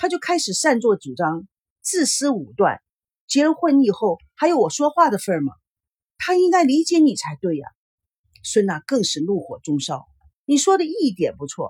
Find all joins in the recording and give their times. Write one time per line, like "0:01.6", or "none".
0:06.1
0:08.2